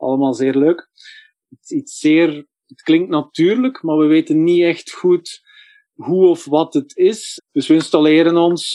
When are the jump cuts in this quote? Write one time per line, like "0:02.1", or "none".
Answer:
0:01.4
0:07.4